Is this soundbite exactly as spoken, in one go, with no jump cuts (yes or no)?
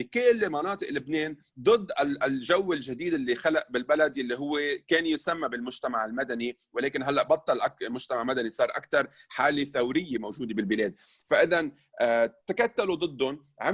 no